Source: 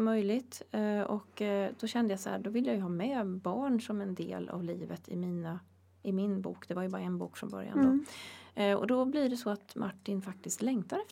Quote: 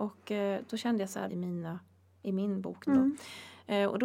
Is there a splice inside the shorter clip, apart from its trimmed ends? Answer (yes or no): yes